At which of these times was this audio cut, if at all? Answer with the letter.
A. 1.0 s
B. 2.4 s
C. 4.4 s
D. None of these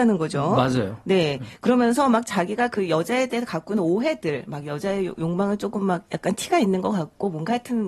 D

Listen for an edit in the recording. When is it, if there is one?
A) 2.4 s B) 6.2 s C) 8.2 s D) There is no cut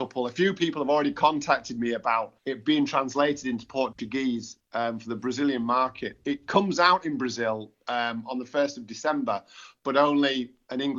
A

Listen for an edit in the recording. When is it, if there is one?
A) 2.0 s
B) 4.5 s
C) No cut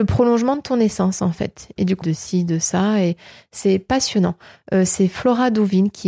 A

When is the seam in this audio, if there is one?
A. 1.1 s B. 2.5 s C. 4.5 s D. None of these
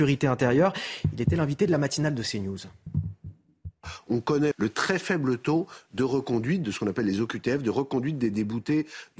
C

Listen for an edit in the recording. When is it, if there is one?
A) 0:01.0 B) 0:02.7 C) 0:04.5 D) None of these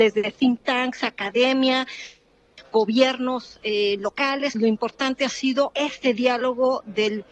C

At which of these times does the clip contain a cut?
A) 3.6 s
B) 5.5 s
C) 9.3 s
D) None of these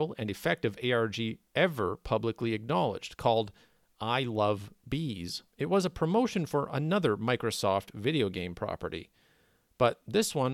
B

